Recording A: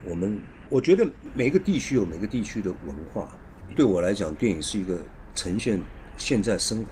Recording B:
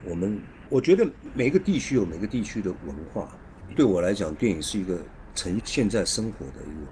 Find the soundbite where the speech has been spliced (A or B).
B